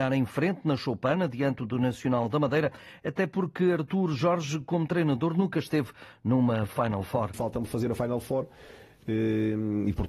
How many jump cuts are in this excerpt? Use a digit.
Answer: 0